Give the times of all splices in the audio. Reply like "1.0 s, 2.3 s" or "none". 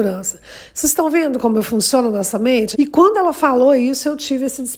2.7 s

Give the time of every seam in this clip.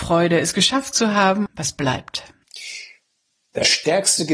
1.5 s

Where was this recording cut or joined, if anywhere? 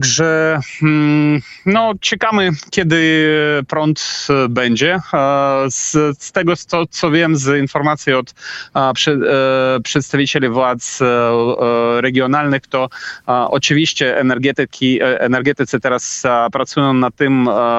none

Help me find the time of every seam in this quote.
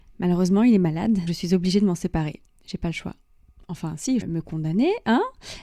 1.3 s, 4.2 s

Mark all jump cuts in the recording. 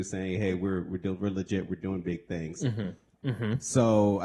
3.2 s

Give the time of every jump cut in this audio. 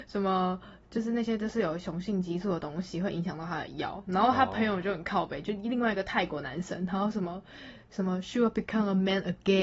none

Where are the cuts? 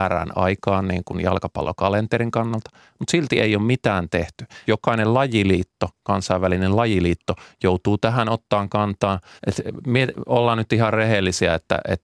4.7 s, 9.4 s

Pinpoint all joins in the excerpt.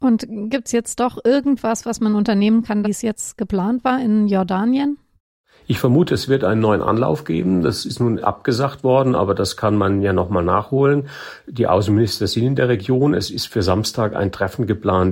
2.8 s

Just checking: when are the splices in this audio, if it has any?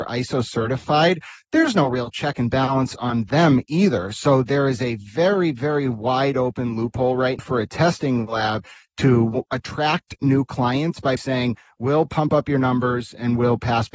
7.4 s, 11.2 s

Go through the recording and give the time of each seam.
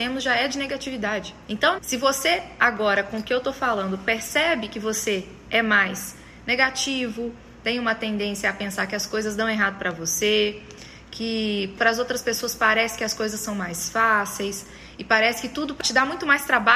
1.8 s

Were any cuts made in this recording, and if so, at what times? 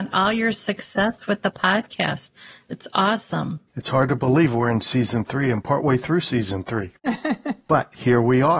3.7 s, 7.0 s

